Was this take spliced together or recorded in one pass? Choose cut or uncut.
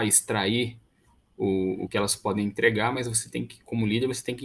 uncut